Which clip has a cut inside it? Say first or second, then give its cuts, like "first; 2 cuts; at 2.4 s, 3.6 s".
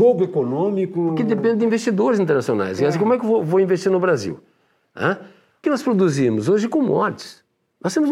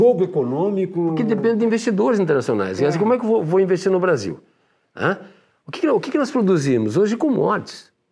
first; 1 cut; at 5.6 s